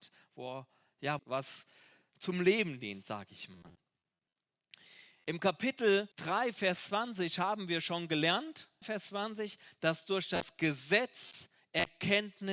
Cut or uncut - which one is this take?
cut